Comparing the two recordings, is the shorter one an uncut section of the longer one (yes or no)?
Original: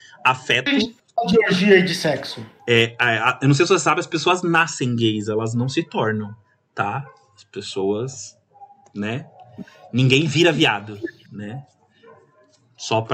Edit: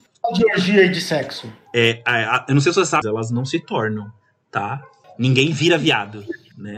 no